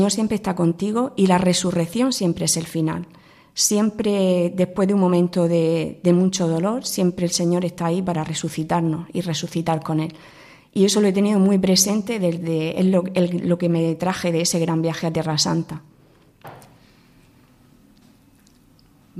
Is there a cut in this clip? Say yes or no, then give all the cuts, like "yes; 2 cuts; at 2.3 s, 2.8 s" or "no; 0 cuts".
no; 0 cuts